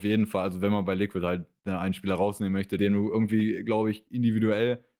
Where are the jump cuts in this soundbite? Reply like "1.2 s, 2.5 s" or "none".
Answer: 2.8 s, 4.1 s